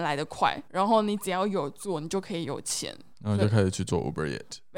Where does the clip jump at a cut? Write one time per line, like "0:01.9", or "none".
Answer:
0:03.1